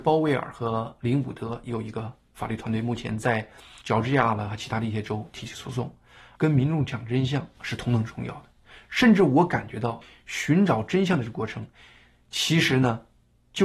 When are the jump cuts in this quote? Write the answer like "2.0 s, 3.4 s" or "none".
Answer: 6.4 s